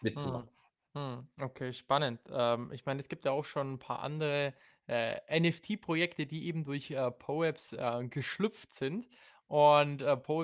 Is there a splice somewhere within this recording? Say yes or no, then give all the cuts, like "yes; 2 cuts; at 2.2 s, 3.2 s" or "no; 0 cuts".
no; 0 cuts